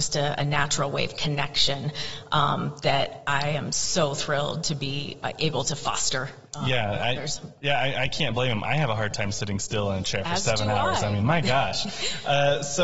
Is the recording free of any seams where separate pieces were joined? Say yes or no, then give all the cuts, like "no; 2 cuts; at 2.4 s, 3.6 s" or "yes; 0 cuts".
yes; 0 cuts